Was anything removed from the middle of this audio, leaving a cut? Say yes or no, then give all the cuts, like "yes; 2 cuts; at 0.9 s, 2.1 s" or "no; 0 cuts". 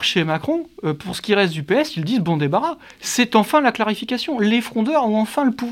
no; 0 cuts